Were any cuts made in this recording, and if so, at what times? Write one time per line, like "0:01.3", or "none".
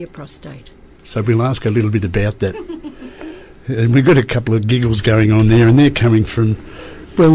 0:01.0